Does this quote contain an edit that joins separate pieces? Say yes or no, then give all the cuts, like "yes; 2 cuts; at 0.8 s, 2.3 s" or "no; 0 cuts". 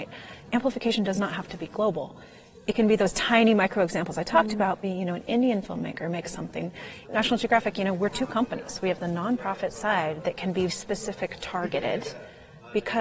yes; 3 cuts; at 4.8 s, 7.0 s, 10.7 s